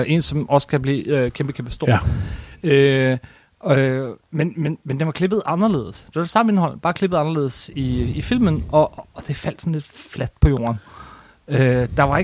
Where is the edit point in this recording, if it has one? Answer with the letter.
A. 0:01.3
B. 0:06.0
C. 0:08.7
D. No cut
D